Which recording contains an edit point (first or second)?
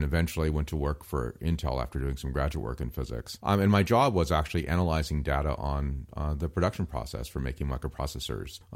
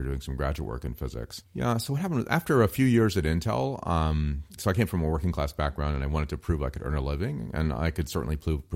second